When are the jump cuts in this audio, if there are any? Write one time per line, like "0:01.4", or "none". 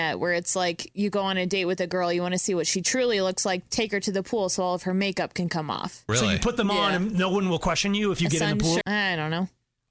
0:06.1
0:08.8